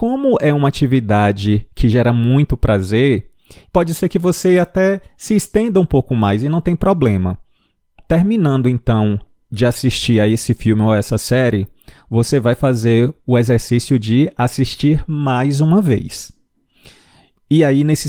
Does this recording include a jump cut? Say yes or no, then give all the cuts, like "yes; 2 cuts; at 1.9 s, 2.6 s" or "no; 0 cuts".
no; 0 cuts